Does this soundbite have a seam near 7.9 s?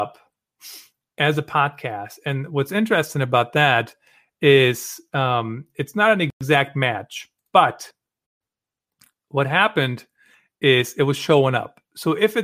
no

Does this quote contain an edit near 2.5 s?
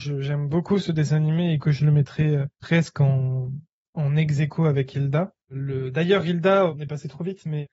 yes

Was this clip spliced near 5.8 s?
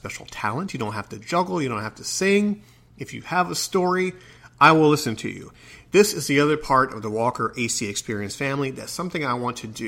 no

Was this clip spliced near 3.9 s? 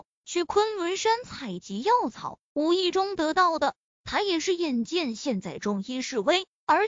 yes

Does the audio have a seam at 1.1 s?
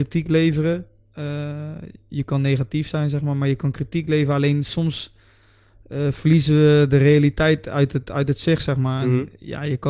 no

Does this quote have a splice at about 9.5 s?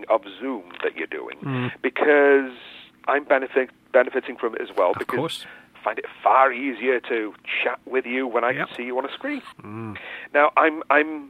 yes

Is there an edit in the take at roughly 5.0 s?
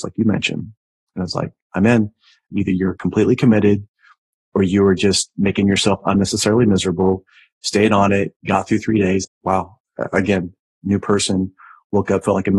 no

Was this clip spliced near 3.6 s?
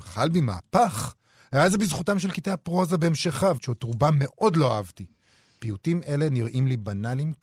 yes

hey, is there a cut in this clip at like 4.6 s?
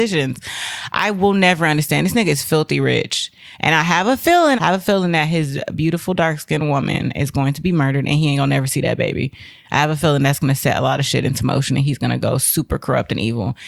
yes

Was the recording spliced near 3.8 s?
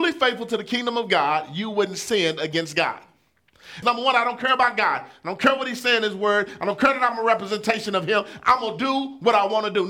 yes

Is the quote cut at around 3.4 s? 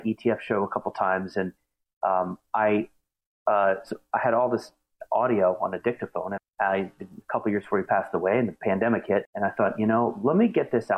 no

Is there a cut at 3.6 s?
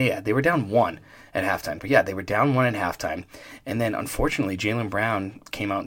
no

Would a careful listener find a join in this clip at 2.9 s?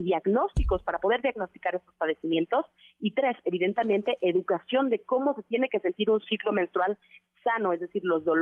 no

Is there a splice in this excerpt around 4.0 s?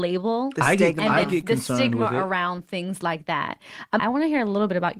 yes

